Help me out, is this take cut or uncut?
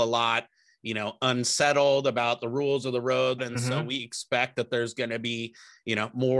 cut